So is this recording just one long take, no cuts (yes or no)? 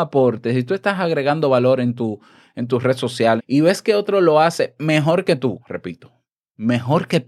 no